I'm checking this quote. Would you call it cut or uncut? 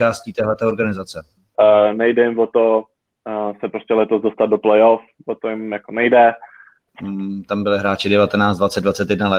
cut